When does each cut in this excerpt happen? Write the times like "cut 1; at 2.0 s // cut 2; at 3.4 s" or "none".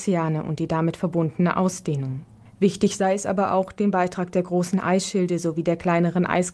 cut 1; at 2.5 s